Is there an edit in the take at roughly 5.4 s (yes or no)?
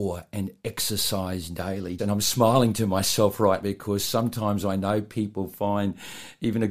no